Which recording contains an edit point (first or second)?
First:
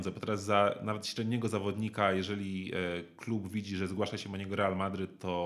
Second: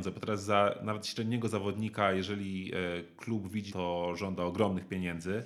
second